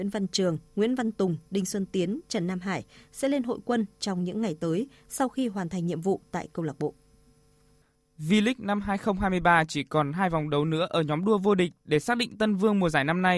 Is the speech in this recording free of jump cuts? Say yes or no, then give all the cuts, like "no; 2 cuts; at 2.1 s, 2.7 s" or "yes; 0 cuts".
yes; 0 cuts